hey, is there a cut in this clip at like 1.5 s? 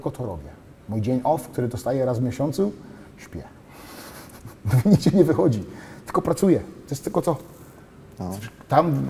no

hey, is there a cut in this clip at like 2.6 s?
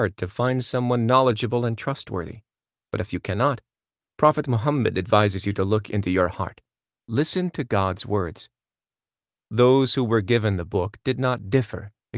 no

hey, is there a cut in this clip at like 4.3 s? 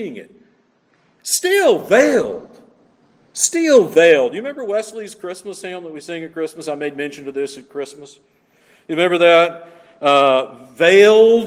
no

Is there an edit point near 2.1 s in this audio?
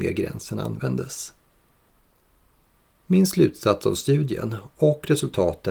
no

